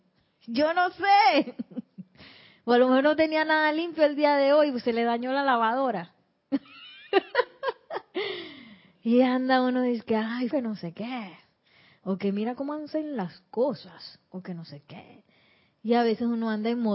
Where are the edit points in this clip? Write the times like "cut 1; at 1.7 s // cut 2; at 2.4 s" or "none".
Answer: cut 1; at 10.5 s